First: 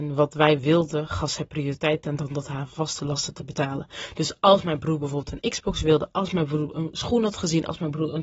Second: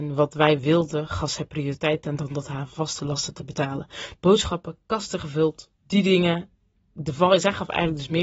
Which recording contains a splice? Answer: second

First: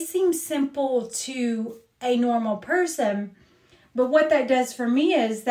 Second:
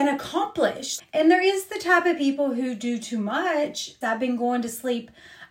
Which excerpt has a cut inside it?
second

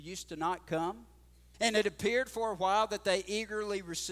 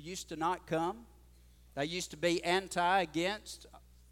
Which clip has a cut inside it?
first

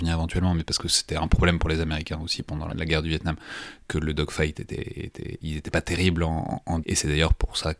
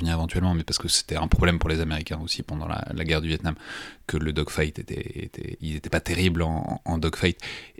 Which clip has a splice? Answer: first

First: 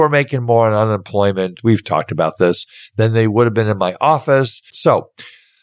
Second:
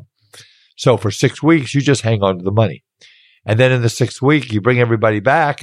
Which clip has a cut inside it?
first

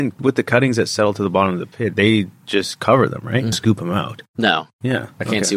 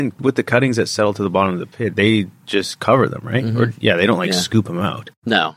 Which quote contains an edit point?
first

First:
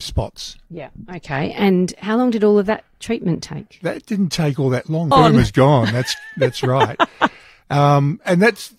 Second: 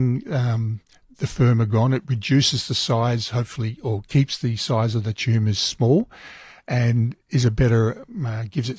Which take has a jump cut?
first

